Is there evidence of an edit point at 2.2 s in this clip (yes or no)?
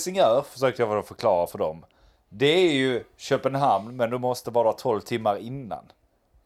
no